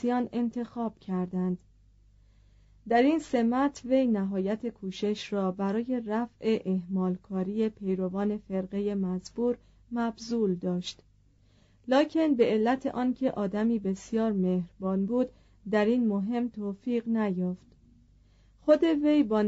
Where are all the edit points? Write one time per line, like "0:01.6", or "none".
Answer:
none